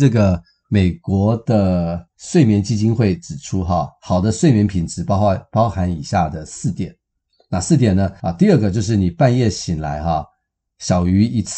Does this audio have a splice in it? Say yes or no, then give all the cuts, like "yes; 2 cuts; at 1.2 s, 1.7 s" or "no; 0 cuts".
yes; 1 cut; at 8.2 s